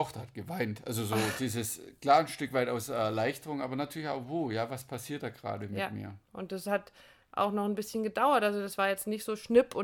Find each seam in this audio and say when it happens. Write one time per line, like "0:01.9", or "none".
none